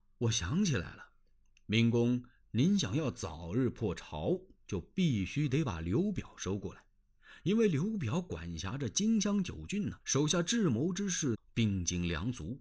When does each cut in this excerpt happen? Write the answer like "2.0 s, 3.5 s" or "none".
10.0 s, 11.3 s